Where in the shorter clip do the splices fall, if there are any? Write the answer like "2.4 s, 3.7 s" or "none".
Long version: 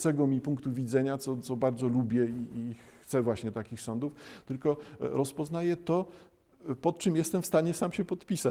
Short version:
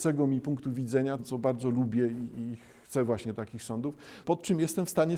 1.2 s, 4.2 s